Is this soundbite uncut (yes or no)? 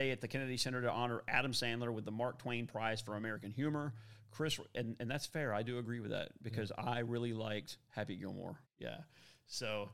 no